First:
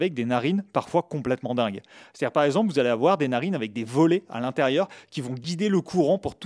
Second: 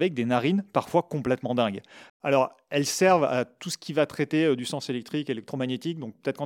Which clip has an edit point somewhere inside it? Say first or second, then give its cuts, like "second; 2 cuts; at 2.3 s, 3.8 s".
second; 1 cut; at 2.1 s